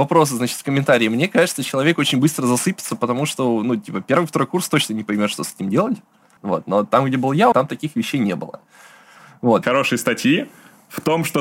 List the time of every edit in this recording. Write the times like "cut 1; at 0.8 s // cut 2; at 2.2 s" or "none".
cut 1; at 6.4 s // cut 2; at 7.5 s // cut 3; at 9.6 s